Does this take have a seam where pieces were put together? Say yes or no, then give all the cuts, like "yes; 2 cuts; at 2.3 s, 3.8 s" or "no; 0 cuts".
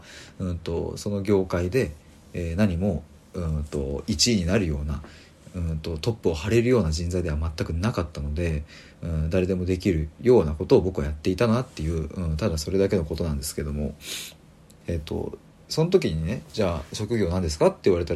yes; 1 cut; at 14.8 s